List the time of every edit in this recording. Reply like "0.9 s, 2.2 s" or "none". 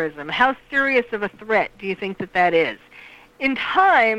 3.3 s